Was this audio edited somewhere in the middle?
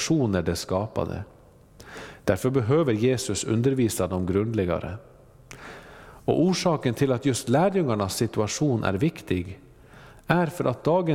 no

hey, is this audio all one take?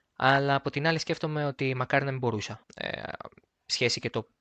no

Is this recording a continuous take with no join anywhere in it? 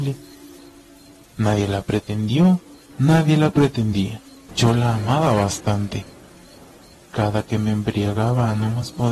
no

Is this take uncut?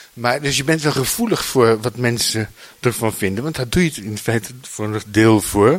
yes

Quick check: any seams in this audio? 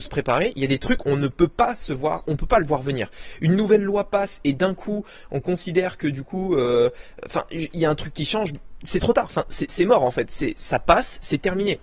yes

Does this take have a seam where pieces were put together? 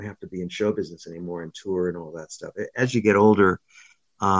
no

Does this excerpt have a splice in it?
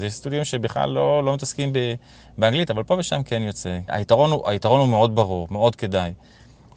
yes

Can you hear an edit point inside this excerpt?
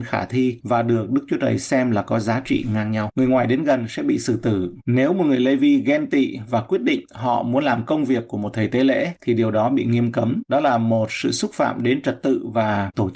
no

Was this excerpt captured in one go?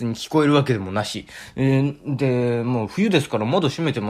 yes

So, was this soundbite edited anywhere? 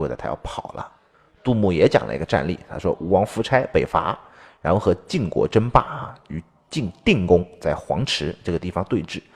no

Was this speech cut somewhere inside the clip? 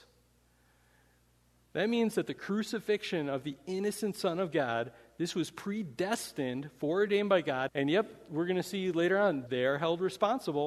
yes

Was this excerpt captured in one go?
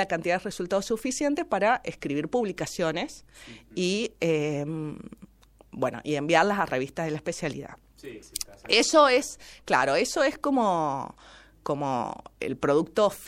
yes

